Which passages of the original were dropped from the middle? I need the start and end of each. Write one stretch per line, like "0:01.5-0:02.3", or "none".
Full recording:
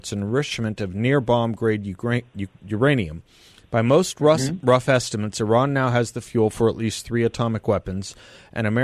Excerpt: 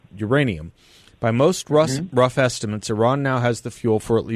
none

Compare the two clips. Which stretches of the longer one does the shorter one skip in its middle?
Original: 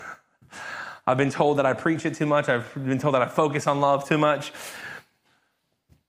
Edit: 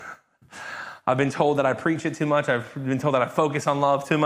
none

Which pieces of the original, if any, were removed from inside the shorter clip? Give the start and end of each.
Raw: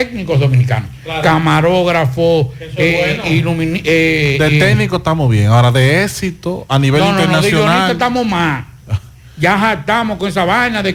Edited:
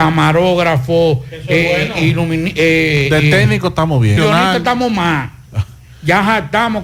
0:05.5-0:07.5

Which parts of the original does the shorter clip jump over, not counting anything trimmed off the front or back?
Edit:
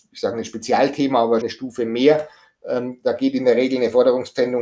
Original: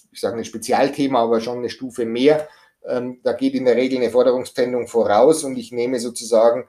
0:01.4-0:01.6

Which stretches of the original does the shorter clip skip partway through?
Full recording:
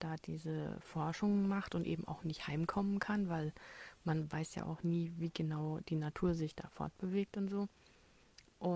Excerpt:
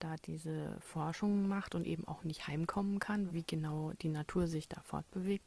0:03.3-0:05.1

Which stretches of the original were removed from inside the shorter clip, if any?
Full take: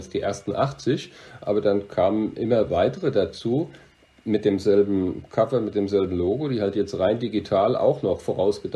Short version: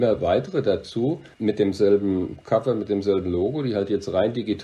0:03.8-0:04.2

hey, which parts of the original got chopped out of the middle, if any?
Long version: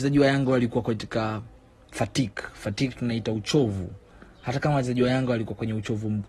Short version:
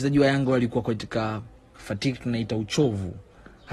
0:01.7-0:02.5

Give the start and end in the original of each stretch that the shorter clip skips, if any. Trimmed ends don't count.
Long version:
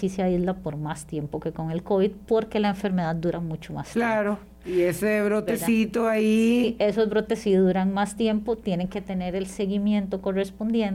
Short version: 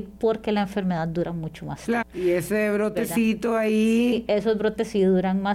0:04.1-0:04.5

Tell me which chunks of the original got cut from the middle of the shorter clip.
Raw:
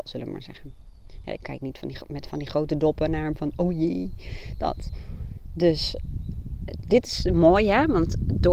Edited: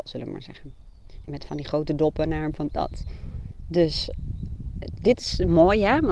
0:01.2-0:02.1
0:03.5-0:04.6

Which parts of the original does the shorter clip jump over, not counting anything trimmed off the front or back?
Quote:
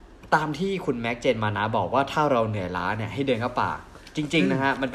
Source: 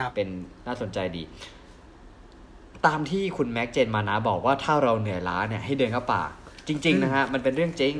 none

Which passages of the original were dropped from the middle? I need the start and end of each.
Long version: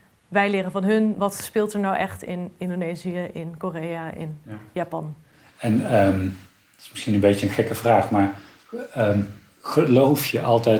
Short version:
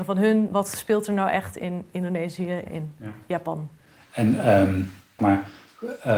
0:03.3-0:04.1
0:06.6-0:08.1

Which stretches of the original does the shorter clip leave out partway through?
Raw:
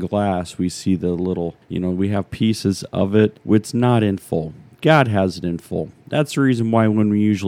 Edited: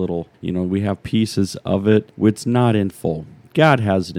none

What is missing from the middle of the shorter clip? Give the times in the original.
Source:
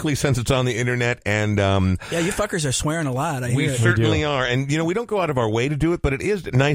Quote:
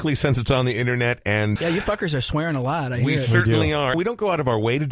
0:01.6-0:02.1
0:04.4-0:04.8

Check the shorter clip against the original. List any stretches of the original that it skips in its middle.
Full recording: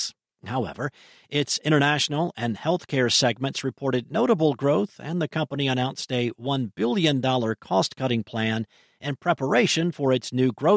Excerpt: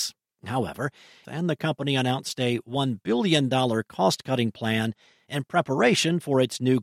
0:01.2-0:05.0

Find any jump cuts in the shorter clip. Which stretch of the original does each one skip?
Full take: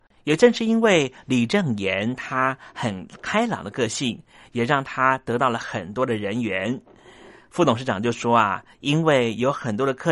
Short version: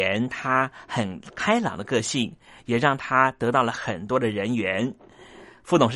none

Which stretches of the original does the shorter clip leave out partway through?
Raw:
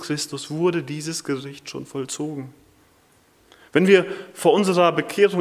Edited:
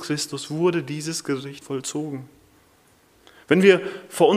0:01.6-0:01.9

